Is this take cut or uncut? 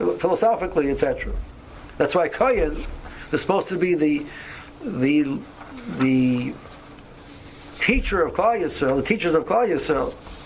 cut